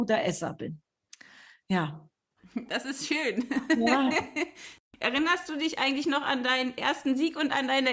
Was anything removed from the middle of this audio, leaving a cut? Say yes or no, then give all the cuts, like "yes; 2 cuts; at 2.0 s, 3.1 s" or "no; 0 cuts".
no; 0 cuts